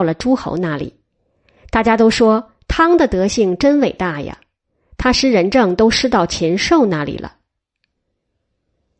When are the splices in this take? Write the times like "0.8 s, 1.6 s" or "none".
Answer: none